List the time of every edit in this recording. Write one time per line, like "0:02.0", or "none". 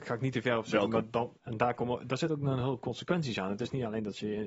0:01.4

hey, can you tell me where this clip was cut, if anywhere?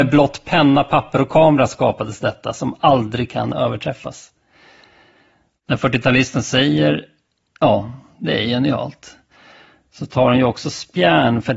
none

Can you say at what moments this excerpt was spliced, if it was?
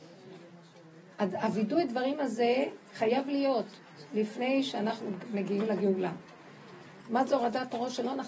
0:07.0

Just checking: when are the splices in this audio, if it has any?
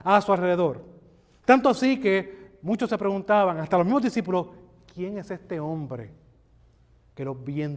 none

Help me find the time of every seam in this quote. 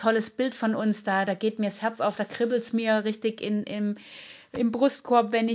none

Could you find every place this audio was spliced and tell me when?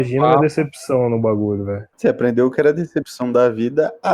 0:01.9

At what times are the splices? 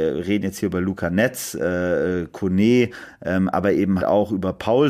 0:04.0

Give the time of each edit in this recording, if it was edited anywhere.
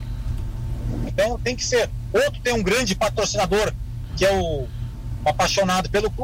0:01.1

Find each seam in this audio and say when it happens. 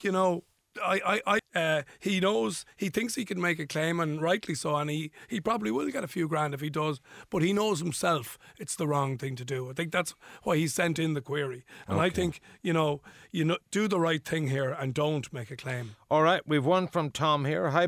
0:01.4

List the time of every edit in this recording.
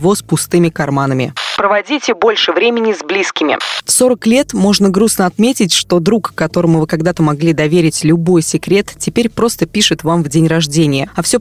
none

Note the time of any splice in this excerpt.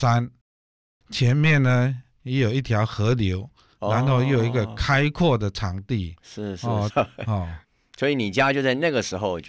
0:06.9

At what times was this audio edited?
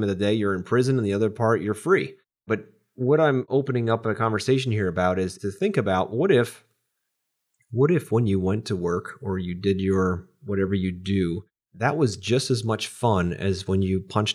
none

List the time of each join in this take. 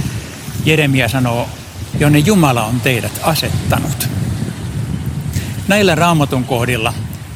0:01.9

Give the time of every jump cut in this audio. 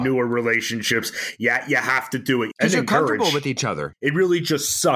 0:02.5
0:03.9

